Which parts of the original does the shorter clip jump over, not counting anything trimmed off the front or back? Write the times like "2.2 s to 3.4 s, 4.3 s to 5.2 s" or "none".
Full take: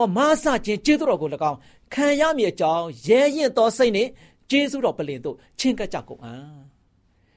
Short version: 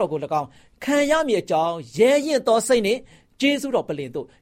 none